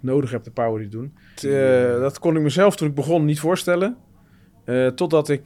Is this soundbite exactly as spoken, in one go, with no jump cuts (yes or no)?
no